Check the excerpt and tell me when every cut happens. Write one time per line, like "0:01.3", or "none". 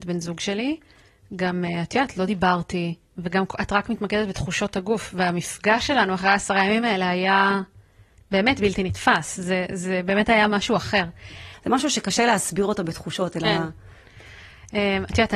0:11.5

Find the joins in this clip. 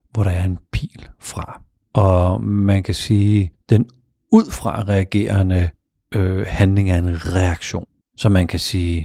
0:01.8
0:08.0

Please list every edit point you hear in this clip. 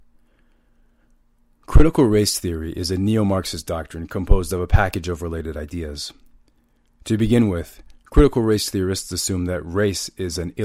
none

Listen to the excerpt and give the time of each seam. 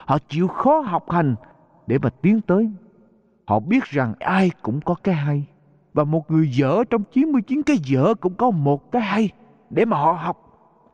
0:04.2
0:05.9

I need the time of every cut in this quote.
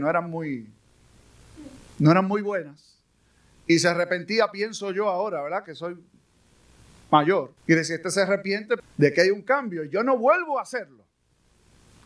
0:07.6
0:08.8

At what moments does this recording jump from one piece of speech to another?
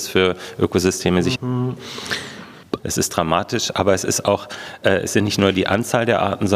0:01.4
0:02.8

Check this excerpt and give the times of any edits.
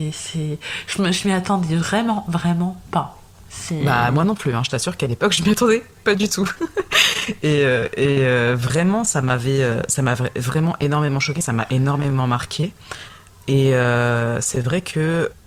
none

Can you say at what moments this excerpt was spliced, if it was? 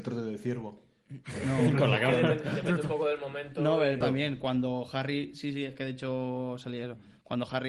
0:04.0

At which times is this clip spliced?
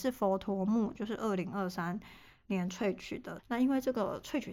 0:00.9
0:03.4

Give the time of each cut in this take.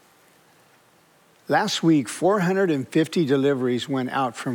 none

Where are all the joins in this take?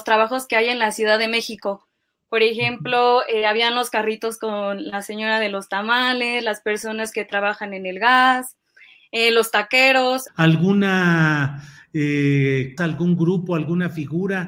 0:10.3
0:12.8

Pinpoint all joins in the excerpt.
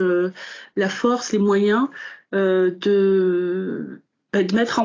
none

